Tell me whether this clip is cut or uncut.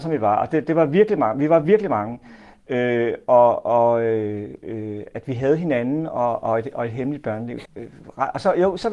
cut